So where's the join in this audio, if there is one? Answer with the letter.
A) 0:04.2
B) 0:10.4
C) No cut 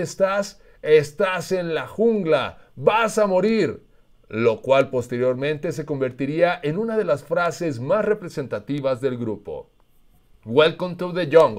C